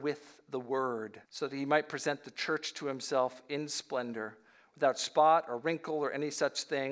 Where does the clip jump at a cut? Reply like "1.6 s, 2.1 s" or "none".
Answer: 1.2 s